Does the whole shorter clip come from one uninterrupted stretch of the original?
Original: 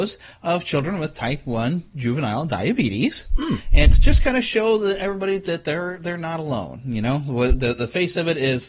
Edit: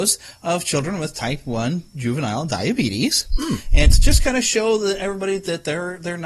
yes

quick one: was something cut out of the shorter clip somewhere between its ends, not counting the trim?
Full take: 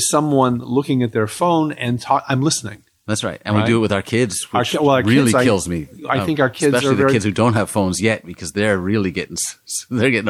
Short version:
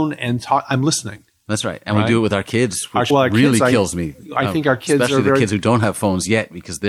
yes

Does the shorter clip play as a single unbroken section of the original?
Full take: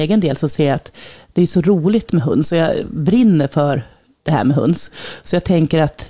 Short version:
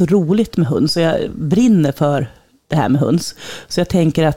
yes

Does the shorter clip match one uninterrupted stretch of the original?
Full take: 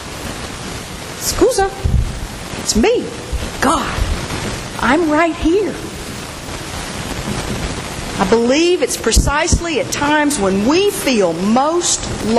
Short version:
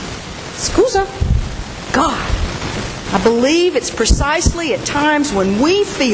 no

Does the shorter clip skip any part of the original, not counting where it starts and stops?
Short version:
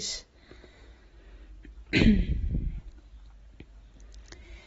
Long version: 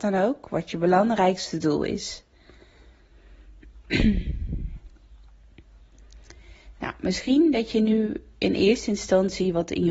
no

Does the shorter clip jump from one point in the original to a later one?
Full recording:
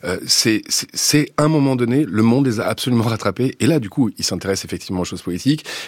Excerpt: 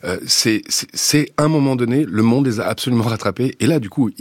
no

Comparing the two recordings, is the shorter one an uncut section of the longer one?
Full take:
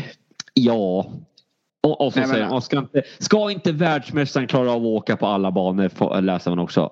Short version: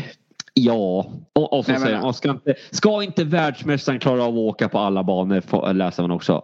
no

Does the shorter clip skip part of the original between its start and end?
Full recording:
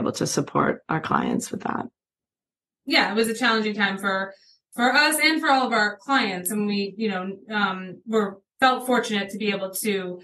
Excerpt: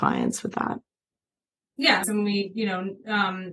yes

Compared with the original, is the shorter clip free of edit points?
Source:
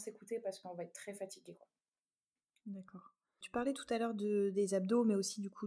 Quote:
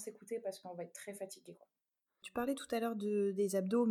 no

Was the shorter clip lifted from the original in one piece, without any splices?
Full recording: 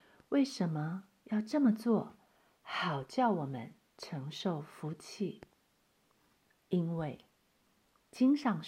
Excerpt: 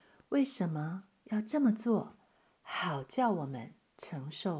yes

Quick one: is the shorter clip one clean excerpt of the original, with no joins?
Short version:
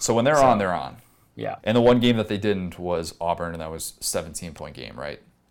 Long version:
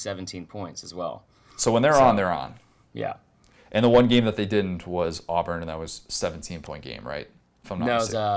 no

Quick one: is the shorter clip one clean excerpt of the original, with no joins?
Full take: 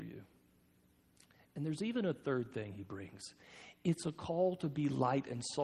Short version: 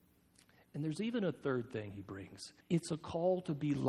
no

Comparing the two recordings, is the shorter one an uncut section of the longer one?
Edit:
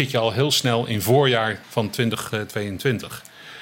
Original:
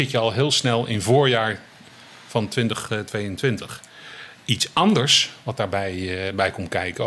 no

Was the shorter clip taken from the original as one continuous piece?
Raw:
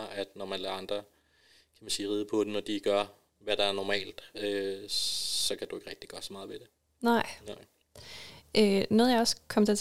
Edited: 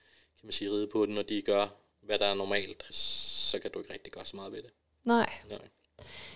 no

